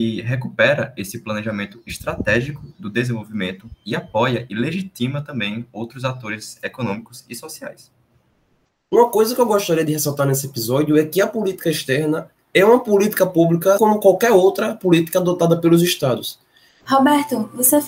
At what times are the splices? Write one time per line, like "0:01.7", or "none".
0:13.8
0:16.8